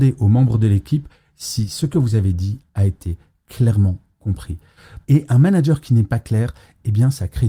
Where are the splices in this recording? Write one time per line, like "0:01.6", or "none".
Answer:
0:05.0